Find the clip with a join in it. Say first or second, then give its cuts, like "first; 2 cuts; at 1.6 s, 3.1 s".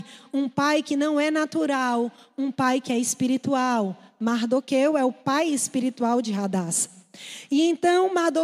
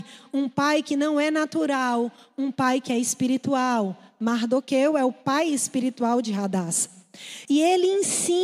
second; 1 cut; at 7.4 s